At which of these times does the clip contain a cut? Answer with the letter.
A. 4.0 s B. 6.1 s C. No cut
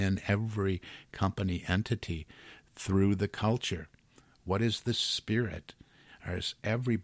C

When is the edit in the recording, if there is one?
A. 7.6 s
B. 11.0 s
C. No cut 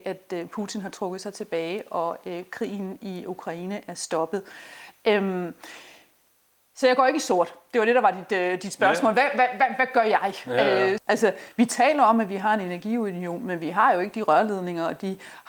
B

